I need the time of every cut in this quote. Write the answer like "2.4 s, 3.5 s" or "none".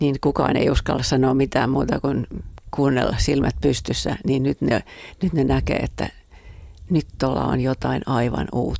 none